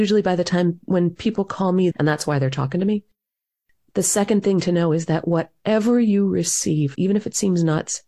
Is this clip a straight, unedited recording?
no; 2 cuts; at 1.9 s, 6.9 s

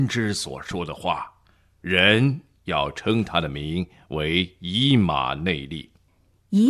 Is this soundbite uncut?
no; 1 cut; at 1.8 s

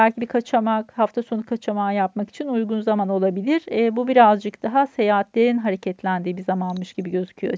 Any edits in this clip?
no; 0 cuts

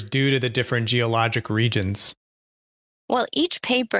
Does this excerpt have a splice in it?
no; 0 cuts

